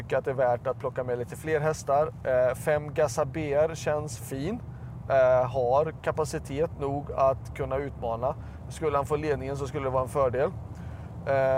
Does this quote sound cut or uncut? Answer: uncut